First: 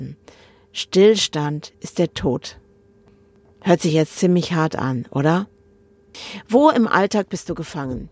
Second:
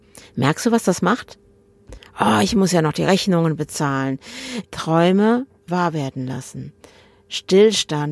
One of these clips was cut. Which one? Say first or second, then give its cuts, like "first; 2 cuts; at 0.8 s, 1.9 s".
second; 1 cut; at 4.6 s